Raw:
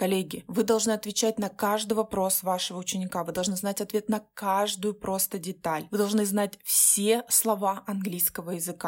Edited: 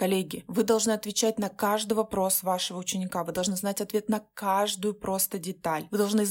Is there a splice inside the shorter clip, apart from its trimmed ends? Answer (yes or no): no